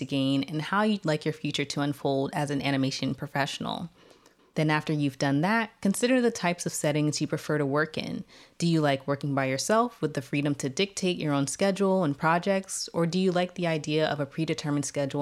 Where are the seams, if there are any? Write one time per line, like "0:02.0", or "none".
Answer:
0:04.4